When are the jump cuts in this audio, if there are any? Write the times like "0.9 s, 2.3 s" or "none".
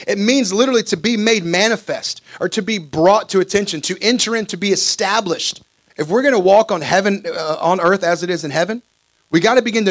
5.9 s